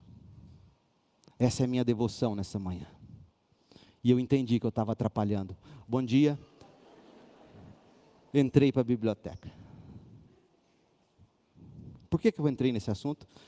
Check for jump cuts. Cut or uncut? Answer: uncut